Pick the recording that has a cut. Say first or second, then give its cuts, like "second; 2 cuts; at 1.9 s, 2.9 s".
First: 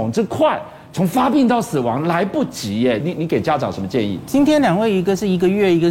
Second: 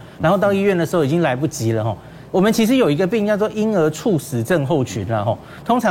first; 1 cut; at 3.0 s